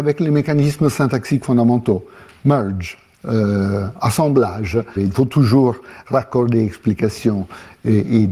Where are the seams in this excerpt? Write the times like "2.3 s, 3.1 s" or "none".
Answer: 5.0 s